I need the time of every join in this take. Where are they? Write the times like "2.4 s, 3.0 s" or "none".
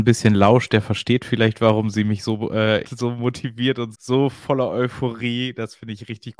2.8 s, 3.9 s